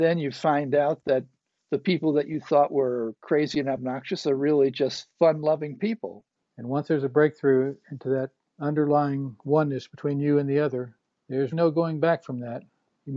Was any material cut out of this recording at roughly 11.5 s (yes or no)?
yes